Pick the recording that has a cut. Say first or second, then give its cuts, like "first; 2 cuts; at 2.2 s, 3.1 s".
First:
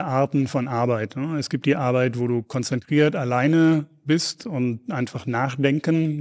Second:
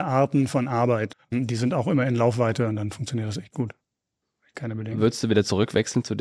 second; 1 cut; at 1.1 s